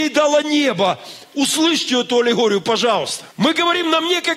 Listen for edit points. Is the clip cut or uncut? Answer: cut